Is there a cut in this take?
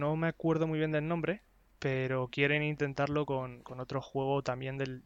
no; 0 cuts

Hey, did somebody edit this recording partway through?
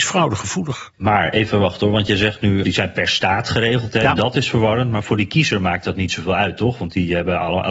yes; 2 cuts; at 0.9 s, 2.6 s

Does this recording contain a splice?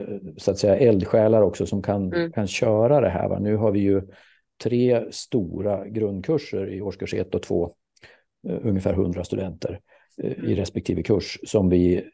no; 0 cuts

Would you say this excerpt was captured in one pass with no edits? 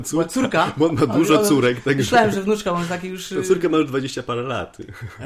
yes; 0 cuts

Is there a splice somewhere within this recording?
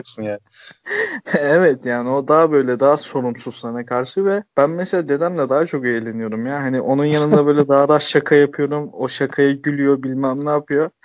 yes; 1 cut; at 4.5 s

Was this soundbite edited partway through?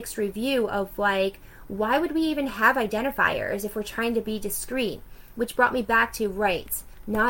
no; 0 cuts

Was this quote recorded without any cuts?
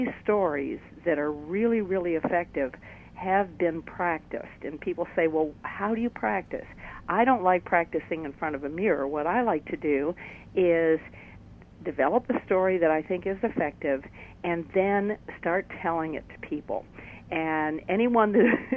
yes; 0 cuts

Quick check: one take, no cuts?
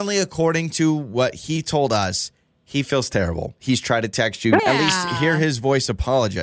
no; 2 cuts; at 3.6 s, 4.6 s

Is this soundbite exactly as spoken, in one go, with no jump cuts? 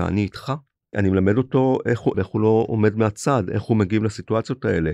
no; 2 cuts; at 0.9 s, 2.1 s

